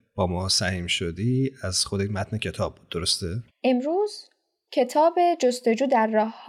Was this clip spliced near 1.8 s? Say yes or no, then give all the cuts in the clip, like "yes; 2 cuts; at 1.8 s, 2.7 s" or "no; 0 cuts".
no; 1 cut; at 3.5 s